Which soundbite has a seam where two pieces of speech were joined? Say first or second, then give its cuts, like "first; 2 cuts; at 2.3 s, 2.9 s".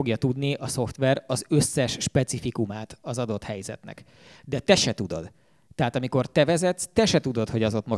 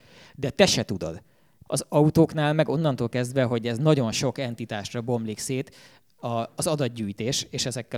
second; 1 cut; at 1.7 s